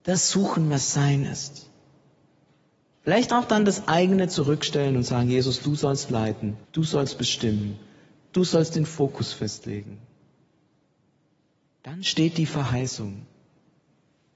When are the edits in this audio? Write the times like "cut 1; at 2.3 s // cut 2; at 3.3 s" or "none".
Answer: cut 1; at 6.6 s